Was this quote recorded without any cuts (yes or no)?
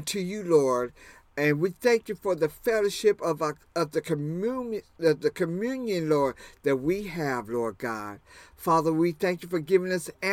yes